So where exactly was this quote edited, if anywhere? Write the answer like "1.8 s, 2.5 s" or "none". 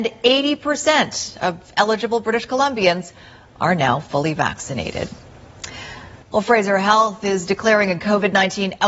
6.2 s